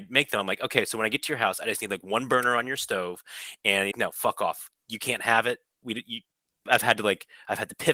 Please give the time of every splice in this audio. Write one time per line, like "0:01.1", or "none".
0:03.9
0:06.7